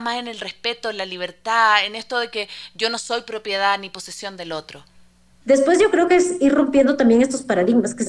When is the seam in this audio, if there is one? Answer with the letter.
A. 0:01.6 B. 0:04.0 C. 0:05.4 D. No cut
C